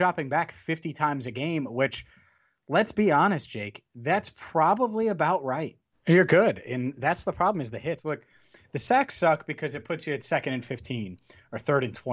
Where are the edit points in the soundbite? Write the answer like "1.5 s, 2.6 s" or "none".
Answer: 5.9 s, 8.0 s